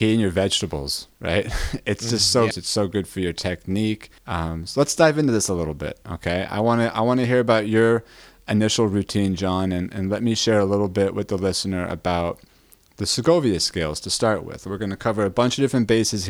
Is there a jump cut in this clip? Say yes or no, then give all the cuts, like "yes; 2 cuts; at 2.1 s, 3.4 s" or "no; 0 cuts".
yes; 2 cuts; at 2.5 s, 4.2 s